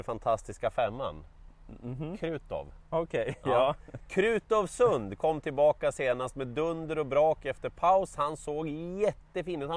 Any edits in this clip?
no; 0 cuts

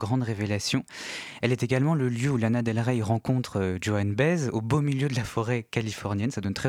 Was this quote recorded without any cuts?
yes; 0 cuts

